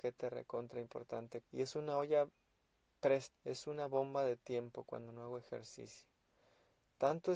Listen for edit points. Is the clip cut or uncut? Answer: cut